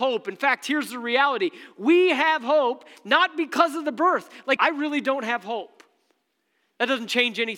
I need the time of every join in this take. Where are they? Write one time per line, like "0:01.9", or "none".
0:04.6